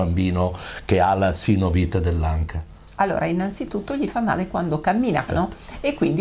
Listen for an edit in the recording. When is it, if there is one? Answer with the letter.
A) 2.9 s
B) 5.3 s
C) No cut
B